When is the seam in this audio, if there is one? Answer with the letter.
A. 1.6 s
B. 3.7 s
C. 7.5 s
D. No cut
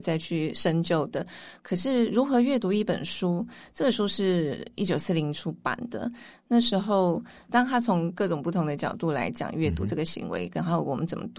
C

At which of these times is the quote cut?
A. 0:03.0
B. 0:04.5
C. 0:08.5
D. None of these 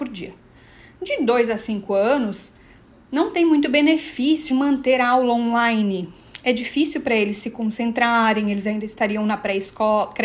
B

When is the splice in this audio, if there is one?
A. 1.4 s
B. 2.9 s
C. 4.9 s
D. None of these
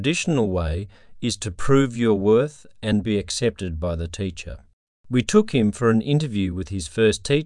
C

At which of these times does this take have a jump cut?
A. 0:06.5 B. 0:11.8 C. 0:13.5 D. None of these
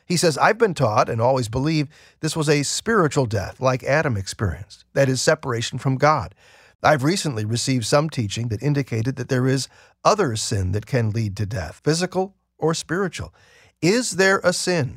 B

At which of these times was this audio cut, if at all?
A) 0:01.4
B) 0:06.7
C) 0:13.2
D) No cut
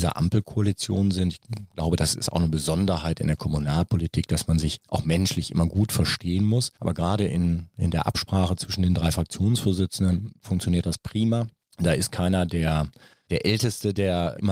D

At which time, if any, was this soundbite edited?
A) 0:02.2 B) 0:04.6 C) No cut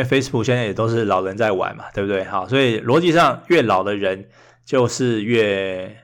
C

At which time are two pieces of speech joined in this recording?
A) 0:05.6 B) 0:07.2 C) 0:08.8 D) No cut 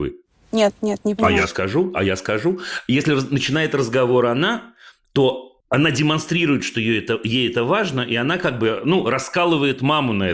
A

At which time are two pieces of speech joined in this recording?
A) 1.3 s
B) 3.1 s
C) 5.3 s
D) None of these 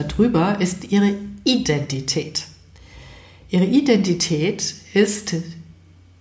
D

